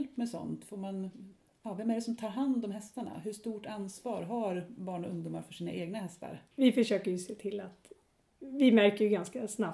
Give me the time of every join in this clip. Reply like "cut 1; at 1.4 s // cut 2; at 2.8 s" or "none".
cut 1; at 6.5 s